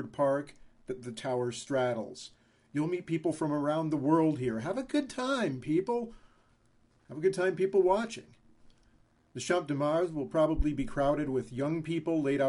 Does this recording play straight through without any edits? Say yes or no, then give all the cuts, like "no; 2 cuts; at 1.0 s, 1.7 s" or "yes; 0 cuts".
yes; 0 cuts